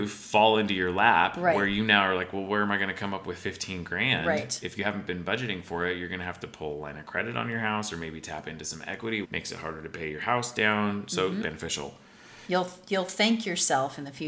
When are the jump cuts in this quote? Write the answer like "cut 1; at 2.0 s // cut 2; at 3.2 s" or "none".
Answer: cut 1; at 9.2 s // cut 2; at 11.4 s